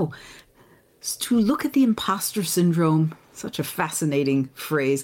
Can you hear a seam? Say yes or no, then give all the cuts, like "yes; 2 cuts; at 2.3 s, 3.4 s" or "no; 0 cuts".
yes; 1 cut; at 3.2 s